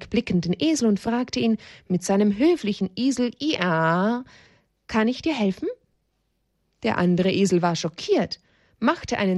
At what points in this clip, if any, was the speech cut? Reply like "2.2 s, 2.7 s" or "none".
none